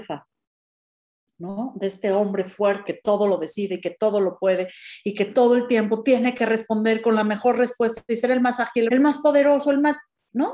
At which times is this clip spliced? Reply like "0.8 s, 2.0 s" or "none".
2.8 s, 8.9 s